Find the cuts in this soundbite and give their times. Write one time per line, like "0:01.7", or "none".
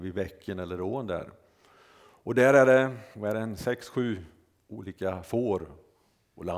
none